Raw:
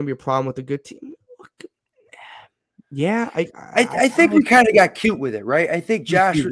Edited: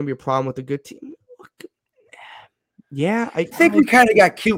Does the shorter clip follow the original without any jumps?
no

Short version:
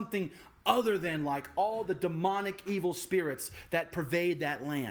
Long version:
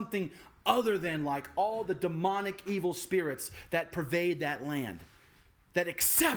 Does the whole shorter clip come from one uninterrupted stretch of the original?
yes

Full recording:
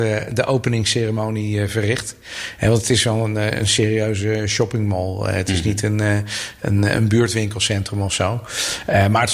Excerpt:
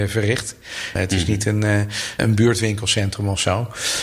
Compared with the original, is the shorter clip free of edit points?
no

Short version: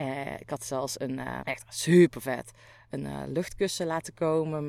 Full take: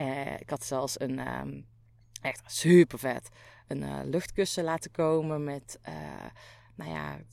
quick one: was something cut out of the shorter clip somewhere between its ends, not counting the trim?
yes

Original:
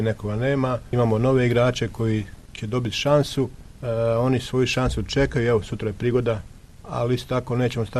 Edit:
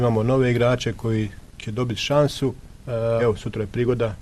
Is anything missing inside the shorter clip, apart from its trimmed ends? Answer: yes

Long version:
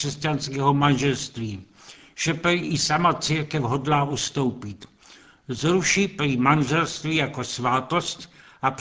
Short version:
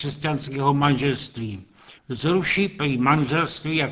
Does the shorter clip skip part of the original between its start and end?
yes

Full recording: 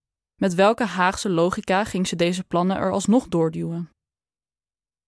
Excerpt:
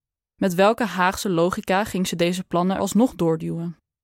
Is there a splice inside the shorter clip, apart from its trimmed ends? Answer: yes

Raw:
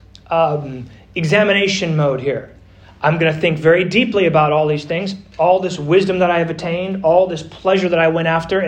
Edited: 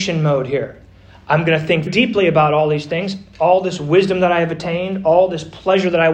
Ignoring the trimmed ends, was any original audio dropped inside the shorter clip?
yes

